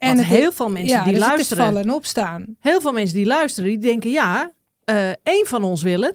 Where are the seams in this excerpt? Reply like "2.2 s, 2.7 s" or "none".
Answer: none